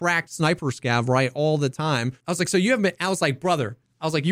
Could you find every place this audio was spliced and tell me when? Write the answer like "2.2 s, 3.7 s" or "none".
2.2 s